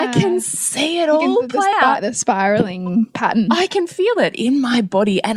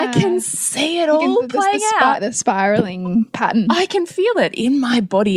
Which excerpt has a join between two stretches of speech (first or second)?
first